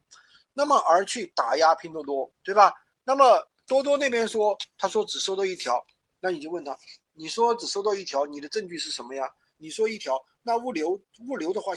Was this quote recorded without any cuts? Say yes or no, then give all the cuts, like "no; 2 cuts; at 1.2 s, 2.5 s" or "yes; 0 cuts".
no; 1 cut; at 9.5 s